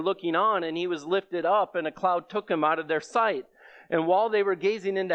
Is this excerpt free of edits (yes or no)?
yes